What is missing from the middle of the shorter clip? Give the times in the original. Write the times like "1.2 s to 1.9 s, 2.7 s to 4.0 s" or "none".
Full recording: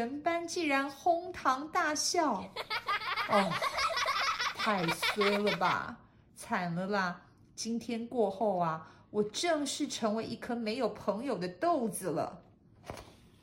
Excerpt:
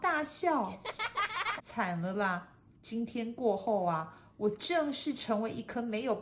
3.3 s to 6.3 s